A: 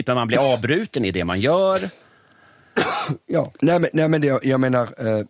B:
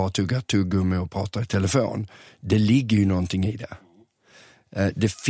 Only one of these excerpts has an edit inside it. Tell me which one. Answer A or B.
A